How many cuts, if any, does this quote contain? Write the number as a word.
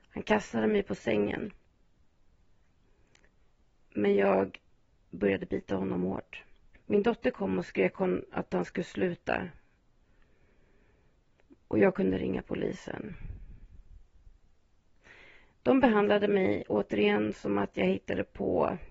one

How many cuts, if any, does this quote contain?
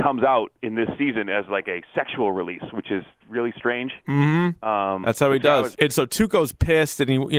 one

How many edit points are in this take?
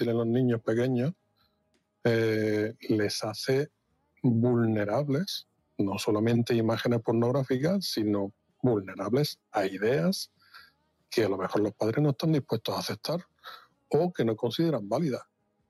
zero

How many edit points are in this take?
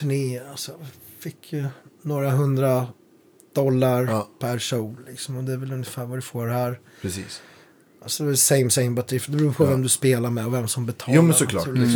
zero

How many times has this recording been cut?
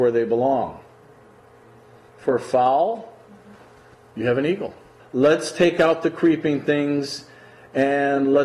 one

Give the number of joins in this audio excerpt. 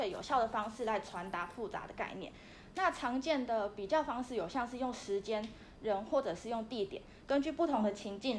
one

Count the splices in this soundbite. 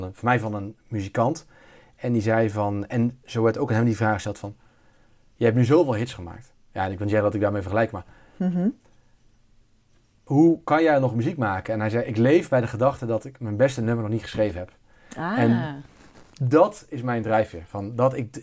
zero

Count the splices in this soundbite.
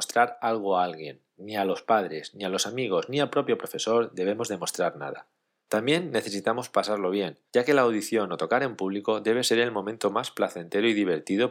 zero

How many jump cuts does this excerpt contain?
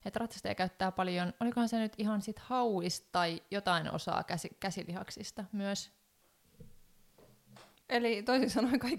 one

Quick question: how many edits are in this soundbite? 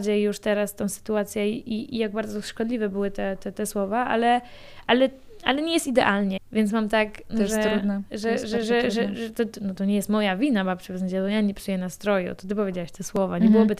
one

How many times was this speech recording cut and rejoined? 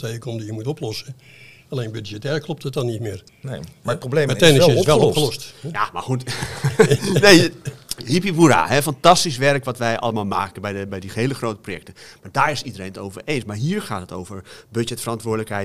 one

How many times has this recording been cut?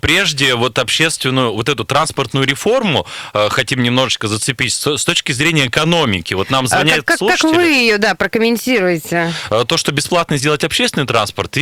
zero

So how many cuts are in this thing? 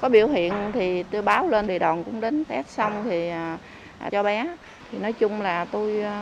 two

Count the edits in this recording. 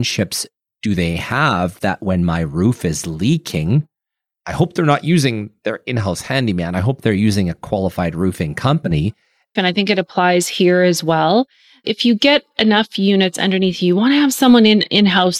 one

